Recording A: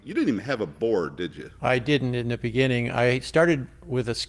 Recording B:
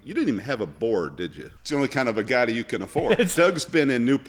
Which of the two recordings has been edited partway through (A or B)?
B